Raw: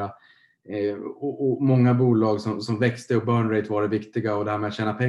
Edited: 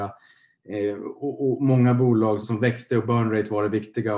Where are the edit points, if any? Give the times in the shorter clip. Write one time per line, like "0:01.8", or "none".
0:02.4